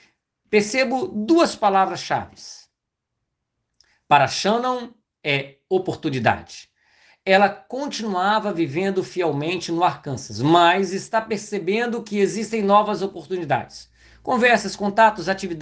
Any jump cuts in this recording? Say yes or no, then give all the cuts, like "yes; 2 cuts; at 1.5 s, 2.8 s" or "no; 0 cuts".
no; 0 cuts